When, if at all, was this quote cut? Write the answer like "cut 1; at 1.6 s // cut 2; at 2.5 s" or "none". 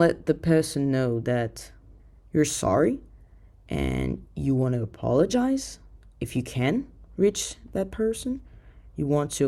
none